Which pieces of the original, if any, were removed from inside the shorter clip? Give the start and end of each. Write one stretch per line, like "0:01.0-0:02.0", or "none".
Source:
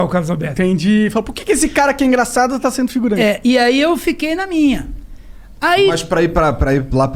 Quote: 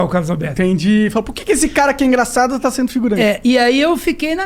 none